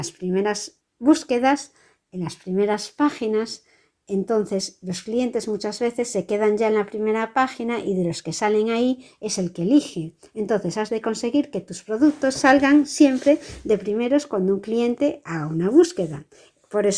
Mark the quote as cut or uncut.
uncut